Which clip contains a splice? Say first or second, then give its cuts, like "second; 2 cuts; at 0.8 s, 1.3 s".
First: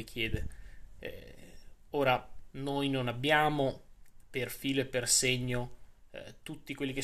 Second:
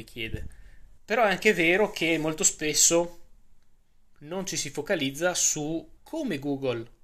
second; 2 cuts; at 1.0 s, 6.0 s